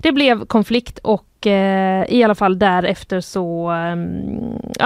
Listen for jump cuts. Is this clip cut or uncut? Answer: uncut